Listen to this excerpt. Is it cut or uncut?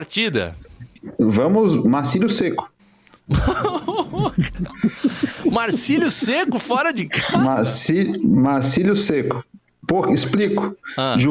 uncut